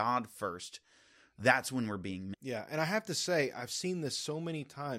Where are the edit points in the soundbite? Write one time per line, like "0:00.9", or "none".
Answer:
0:02.3